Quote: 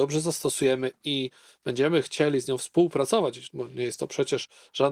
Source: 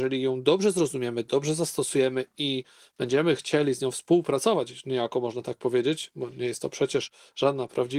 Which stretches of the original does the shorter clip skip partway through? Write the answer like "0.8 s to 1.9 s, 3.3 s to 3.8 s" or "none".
4.8 s to 6.1 s